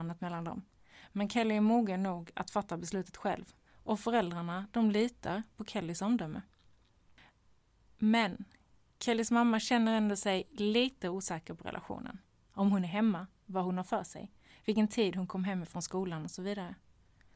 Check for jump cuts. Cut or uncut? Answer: cut